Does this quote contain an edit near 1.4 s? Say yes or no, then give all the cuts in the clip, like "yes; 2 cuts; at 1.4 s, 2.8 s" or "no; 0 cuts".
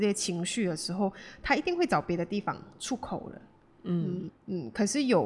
no; 1 cut; at 4.3 s